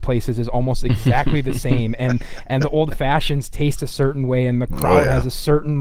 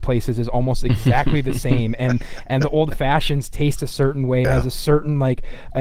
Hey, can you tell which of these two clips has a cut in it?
second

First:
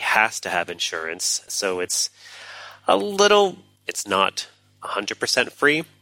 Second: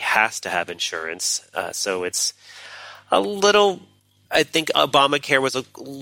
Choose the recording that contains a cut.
first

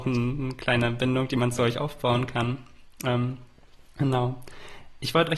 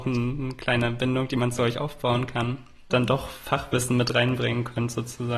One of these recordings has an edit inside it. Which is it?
second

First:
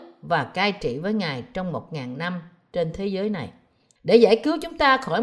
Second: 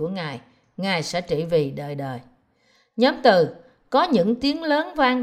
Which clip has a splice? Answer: first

